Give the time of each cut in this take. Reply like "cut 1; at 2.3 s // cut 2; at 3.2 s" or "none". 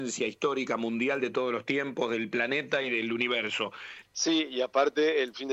cut 1; at 4.0 s